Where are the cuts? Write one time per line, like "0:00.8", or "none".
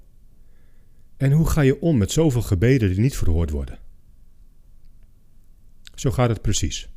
0:01.1
0:05.9